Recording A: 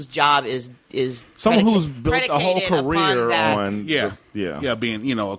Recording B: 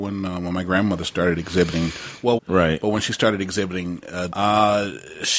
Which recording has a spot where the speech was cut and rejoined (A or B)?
B